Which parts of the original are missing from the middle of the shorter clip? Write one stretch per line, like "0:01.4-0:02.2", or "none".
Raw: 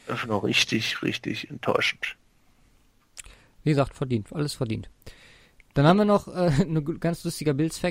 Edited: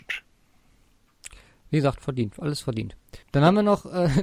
0:05.2-0:05.6